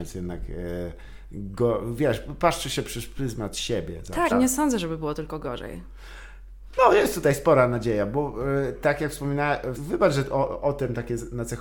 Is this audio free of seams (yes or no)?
no